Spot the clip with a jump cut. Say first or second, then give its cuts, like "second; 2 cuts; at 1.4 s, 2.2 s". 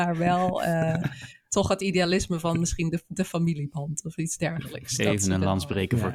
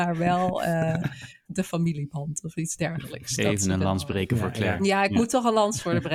second; 1 cut; at 1.5 s